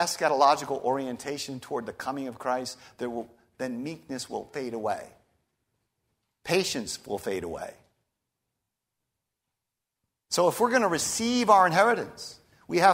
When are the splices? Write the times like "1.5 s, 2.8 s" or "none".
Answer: none